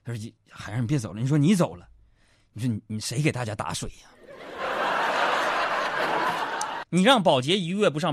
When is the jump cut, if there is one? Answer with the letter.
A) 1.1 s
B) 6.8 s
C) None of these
B